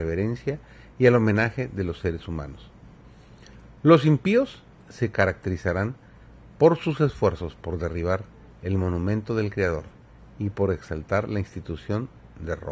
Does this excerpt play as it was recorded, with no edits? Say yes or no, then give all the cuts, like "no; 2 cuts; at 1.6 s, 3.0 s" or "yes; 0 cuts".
yes; 0 cuts